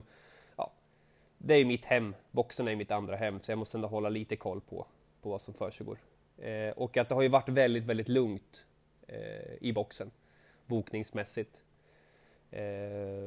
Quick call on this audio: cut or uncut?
uncut